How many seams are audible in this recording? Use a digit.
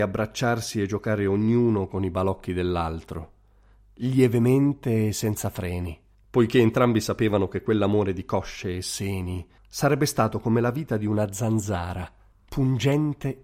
1